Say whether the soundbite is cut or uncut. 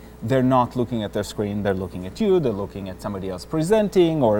uncut